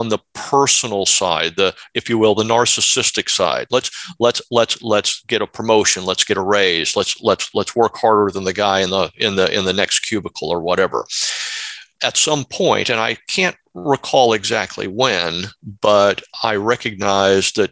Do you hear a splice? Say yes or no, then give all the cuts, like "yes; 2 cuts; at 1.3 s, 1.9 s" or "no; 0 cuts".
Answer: no; 0 cuts